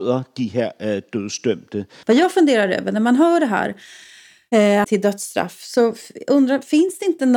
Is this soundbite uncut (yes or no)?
no